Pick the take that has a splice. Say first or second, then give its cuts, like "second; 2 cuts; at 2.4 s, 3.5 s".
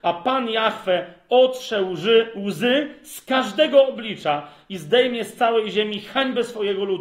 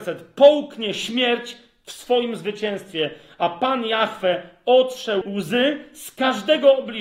second; 1 cut; at 5.2 s